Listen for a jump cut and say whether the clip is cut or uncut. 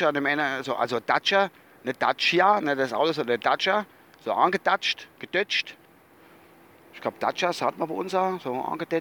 uncut